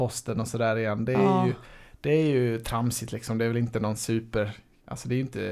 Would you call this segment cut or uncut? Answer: uncut